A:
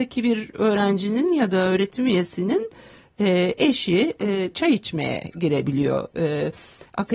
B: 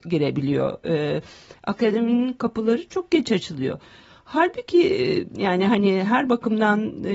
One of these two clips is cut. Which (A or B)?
A